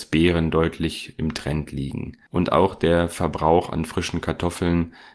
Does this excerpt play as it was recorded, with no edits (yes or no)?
no